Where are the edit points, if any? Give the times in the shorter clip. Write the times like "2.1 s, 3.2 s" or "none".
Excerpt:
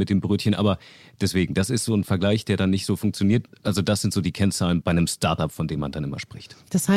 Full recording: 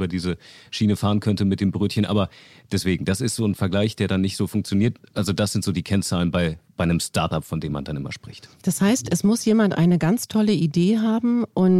4.8 s